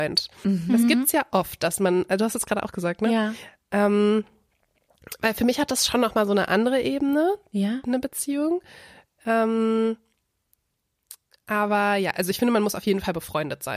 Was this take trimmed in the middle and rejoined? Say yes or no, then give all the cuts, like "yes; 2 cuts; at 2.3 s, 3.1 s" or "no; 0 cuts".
no; 0 cuts